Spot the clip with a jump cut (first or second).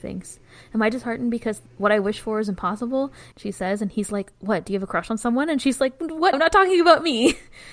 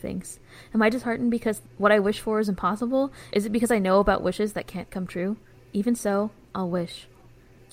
first